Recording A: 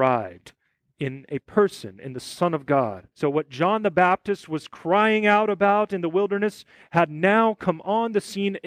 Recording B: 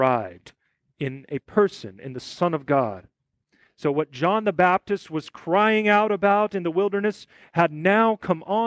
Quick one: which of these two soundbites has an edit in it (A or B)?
A